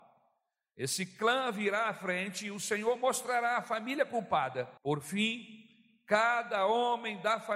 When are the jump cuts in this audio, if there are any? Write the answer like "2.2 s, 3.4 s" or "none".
4.8 s

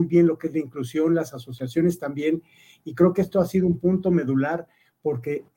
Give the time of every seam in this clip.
none

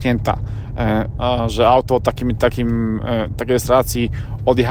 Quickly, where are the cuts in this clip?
1.1 s

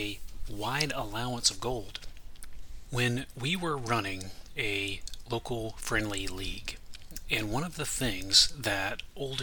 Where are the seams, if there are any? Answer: 2.8 s, 7.2 s

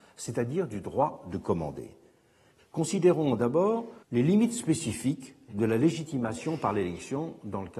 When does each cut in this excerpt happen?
2.6 s, 4.0 s

